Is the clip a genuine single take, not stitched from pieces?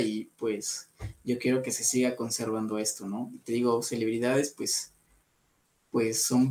yes; 0 cuts

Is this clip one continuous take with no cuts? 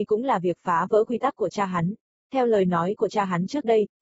yes; 0 cuts

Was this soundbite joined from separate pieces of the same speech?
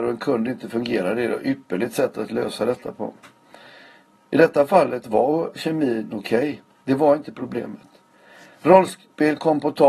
no; 0 cuts

